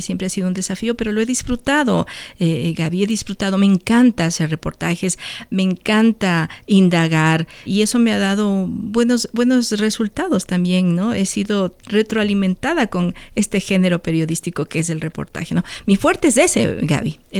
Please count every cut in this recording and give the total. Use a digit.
1